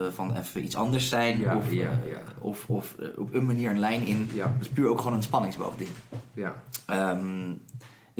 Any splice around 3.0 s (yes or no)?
no